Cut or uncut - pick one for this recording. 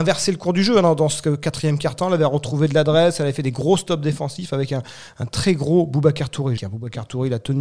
cut